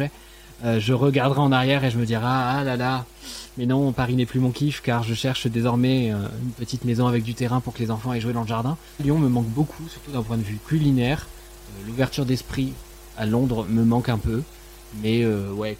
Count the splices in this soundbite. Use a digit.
1